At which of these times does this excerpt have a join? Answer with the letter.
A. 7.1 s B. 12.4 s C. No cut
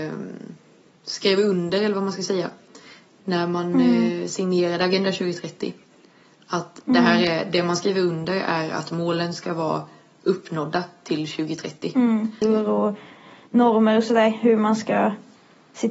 B